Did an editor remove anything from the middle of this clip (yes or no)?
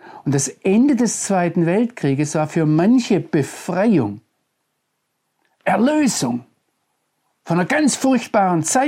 no